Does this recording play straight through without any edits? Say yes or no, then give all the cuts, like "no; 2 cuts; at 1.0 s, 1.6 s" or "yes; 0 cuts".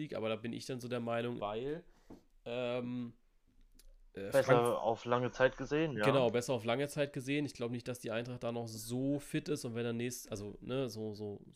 no; 1 cut; at 1.4 s